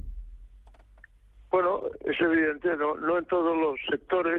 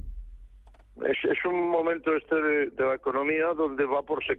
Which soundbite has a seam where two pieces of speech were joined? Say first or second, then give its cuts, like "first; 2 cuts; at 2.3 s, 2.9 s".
second; 1 cut; at 0.9 s